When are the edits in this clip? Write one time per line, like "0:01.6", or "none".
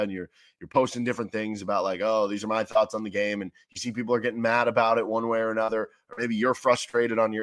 none